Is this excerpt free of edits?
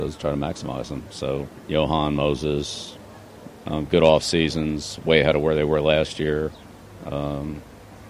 no; 2 cuts; at 1.7 s, 3.6 s

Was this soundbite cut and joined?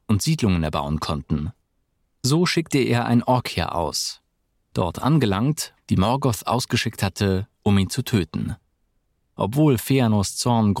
yes; 2 cuts; at 4.5 s, 5.8 s

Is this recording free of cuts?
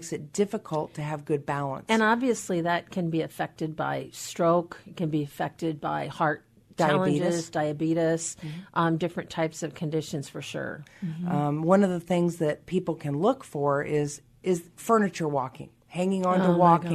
no; 2 cuts; at 10.9 s, 14.8 s

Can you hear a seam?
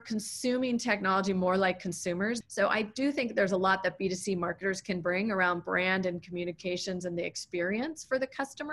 yes; 1 cut; at 2.4 s

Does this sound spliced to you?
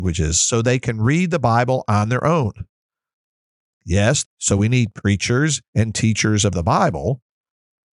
yes; 1 cut; at 4.2 s

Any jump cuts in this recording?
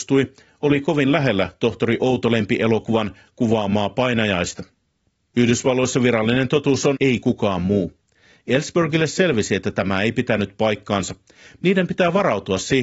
yes; 2 cuts; at 6.9 s, 11.6 s

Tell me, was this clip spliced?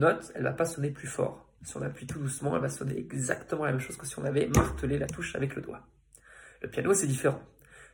no; 0 cuts

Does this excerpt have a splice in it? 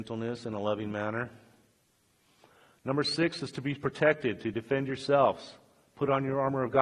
no; 0 cuts

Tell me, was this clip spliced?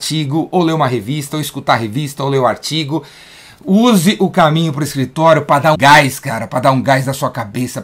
yes; 1 cut; at 5.7 s

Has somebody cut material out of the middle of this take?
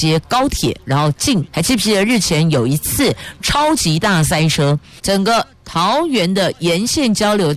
yes; 2 cuts; at 1.5 s, 5.0 s

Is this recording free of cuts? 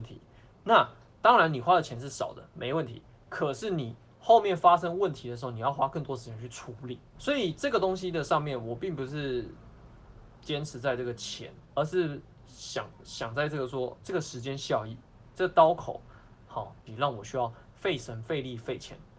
no; 3 cuts; at 7.1 s, 11.7 s, 16.9 s

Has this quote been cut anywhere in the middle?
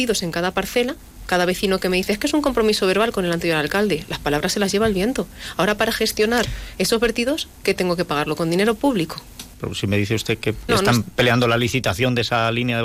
yes; 2 cuts; at 9.5 s, 10.7 s

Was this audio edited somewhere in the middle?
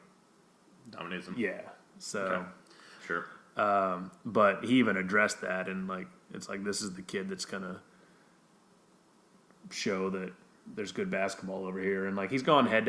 yes; 1 cut; at 3.0 s

